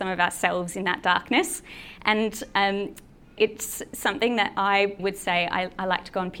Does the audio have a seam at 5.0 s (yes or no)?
yes